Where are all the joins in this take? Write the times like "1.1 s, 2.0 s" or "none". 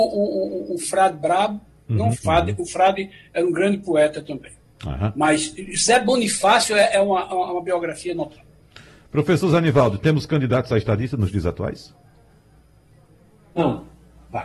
2.1 s